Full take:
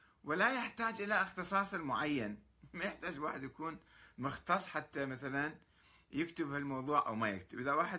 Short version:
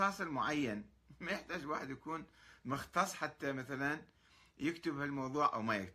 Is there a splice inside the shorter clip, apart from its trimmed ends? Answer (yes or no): no